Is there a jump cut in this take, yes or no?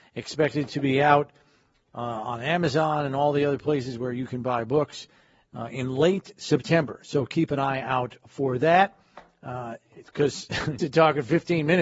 yes